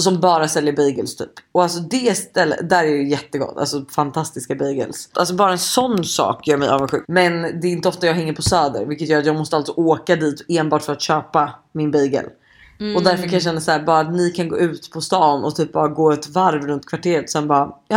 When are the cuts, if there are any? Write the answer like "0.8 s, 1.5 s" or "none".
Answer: 5.1 s, 7.0 s